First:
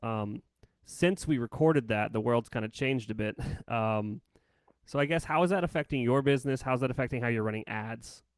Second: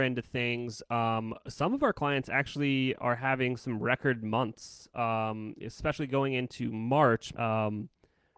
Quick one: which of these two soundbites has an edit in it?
second; 1 cut; at 7.3 s

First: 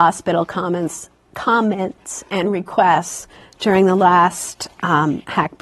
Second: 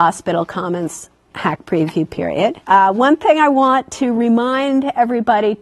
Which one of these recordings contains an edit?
second; 2 cuts; at 1.3 s, 2.6 s

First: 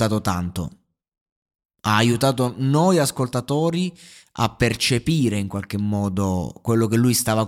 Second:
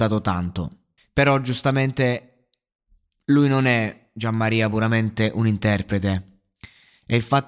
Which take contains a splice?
second; 1 cut; at 1.0 s

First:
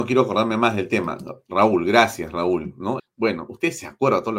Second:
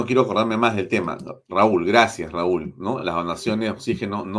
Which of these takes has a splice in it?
first; 1 cut; at 3.0 s

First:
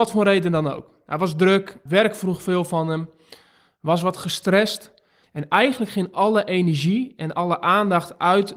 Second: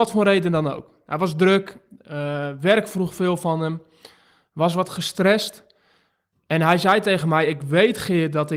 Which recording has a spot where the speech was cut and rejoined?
first; 2 cuts; at 1.9 s, 5.2 s

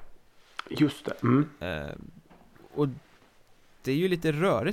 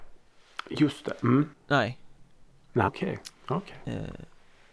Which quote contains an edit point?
second; 2 cuts; at 1.5 s, 2.9 s

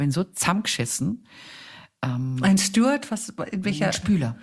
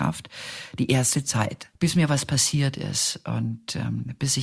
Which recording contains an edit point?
second; 1 cut; at 1.8 s

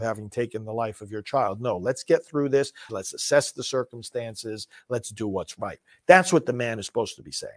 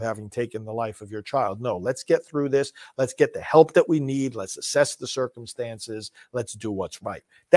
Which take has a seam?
first; 1 cut; at 2.9 s

